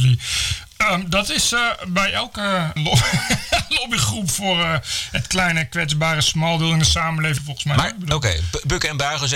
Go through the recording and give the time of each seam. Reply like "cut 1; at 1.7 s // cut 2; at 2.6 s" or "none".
cut 1; at 2.8 s // cut 2; at 7.4 s